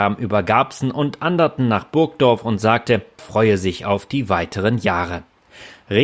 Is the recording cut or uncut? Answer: cut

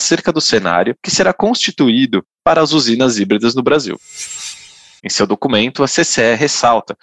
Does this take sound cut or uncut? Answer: cut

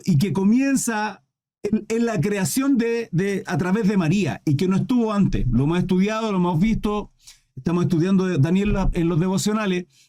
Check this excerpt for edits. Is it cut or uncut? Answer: cut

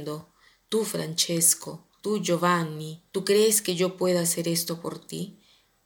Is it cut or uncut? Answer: cut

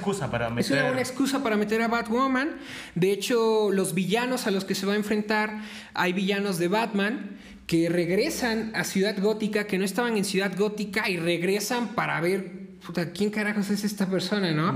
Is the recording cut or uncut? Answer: uncut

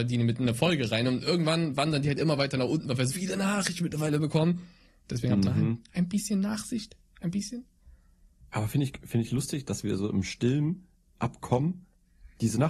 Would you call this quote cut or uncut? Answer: cut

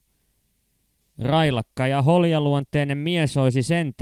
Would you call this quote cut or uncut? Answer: cut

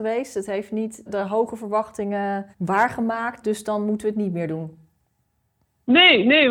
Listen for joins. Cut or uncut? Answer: cut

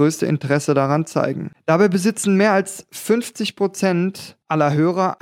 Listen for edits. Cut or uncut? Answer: uncut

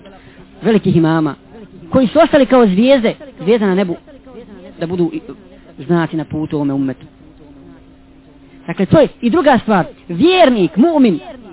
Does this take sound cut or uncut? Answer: uncut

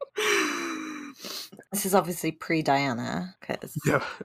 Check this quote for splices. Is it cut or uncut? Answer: cut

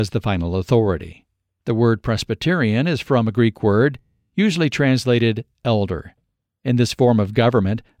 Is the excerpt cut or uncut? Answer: cut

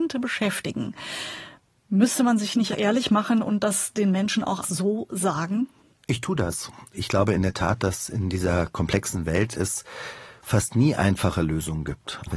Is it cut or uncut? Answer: cut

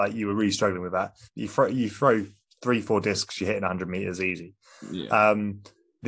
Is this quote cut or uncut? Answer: cut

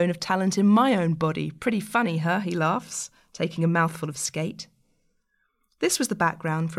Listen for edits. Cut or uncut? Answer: uncut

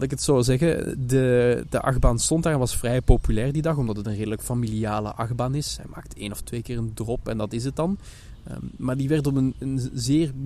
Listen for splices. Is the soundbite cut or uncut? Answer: uncut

